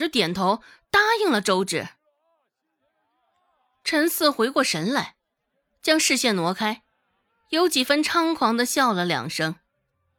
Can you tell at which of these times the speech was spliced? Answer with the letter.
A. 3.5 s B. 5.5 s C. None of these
C